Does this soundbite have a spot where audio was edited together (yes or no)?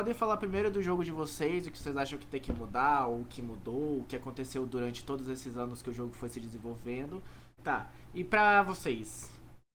yes